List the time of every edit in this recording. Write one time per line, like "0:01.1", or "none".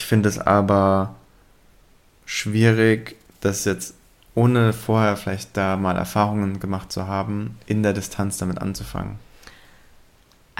none